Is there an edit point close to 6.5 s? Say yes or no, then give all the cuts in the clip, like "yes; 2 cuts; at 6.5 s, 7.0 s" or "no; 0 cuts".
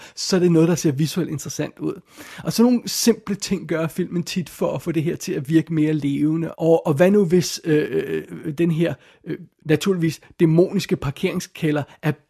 yes; 1 cut; at 6.5 s